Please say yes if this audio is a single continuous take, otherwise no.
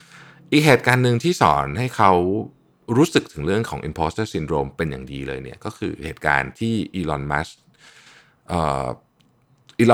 yes